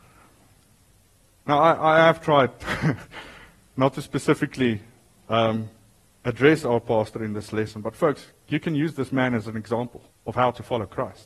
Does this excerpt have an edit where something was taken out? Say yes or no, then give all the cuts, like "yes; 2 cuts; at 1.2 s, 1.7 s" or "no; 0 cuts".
no; 0 cuts